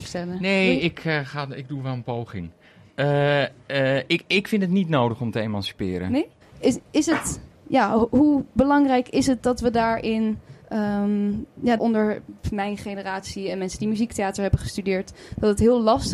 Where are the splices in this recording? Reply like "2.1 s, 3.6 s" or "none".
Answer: 6.4 s, 10.6 s, 11.8 s